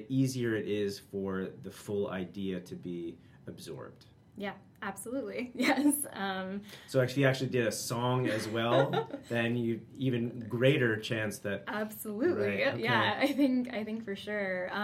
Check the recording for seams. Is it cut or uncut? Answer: uncut